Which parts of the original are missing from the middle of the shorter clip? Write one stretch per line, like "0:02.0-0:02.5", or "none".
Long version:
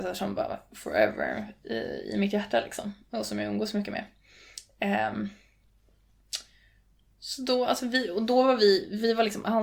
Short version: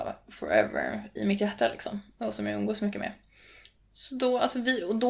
0:01.6-0:02.1
0:04.7-0:07.0